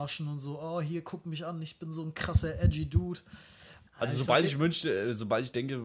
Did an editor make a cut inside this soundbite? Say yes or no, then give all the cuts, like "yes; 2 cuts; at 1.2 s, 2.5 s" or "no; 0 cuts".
yes; 1 cut; at 3.9 s